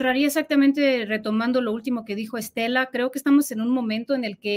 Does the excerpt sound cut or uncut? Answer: uncut